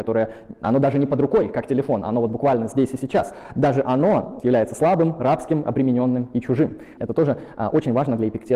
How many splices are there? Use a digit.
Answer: 2